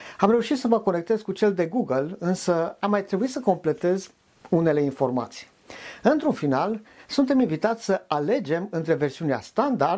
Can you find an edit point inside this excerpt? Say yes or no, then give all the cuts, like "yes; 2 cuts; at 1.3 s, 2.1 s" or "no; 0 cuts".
no; 0 cuts